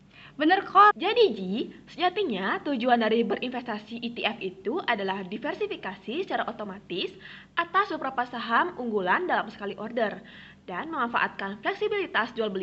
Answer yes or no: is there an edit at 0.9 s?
yes